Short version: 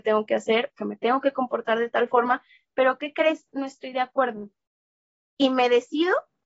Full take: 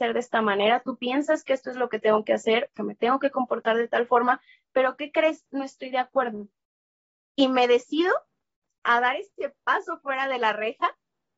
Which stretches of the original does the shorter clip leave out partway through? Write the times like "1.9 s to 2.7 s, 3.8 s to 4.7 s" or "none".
none